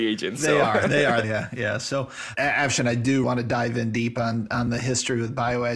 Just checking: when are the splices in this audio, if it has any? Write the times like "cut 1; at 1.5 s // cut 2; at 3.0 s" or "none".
cut 1; at 1.2 s // cut 2; at 3.2 s